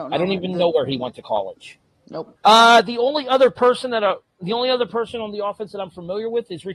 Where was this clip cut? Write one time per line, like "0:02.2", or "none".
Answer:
0:02.4

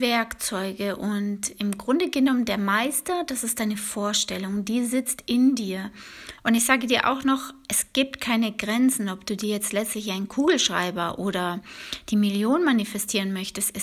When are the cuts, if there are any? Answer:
0:06.4

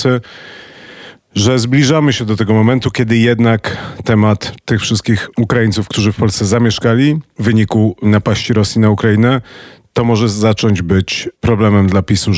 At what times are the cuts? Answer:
none

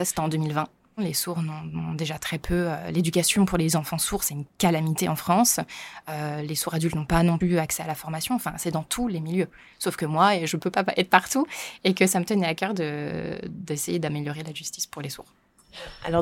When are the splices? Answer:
0:01.0

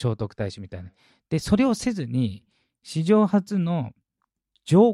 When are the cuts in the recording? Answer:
none

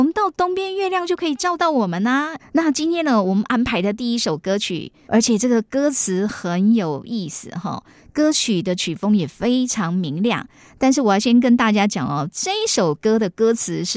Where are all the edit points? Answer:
0:02.4
0:05.1

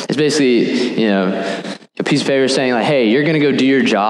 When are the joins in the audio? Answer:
0:01.9

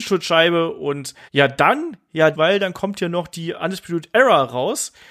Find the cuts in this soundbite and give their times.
0:01.3
0:02.3

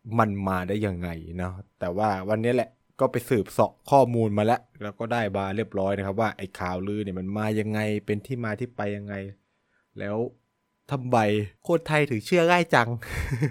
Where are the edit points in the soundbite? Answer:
0:11.6

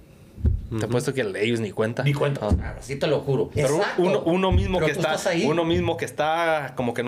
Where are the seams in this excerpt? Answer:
0:02.4
0:03.5

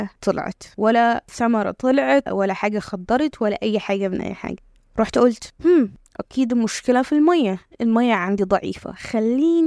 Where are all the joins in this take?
0:02.3

